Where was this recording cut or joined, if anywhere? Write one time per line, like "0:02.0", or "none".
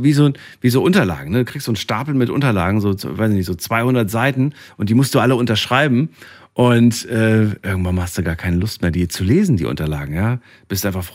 none